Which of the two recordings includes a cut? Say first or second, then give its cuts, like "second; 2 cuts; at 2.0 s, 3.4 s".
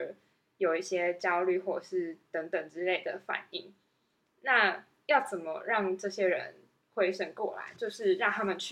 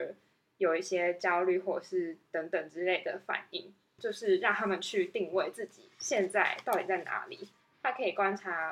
second; 1 cut; at 4.0 s